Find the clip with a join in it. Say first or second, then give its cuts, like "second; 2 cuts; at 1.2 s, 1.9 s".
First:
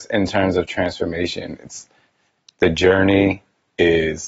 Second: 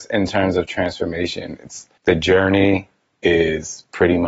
second; 1 cut; at 2.0 s